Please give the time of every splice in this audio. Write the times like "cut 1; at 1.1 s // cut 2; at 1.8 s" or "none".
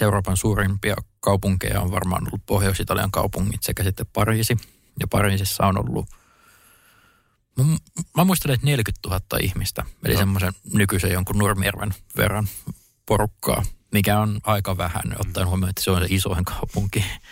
none